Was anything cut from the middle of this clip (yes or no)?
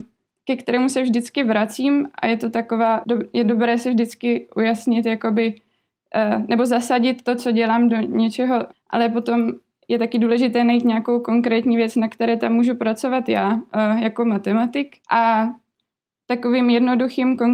yes